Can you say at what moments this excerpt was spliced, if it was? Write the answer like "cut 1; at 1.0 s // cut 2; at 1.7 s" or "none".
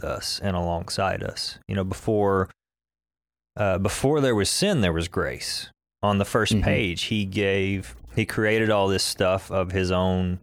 none